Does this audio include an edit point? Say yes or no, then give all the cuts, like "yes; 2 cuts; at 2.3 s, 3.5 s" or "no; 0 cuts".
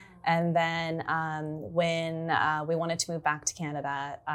no; 0 cuts